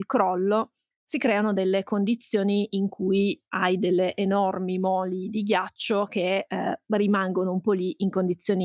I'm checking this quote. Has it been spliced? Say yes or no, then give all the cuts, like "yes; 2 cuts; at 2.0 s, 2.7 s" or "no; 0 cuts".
no; 0 cuts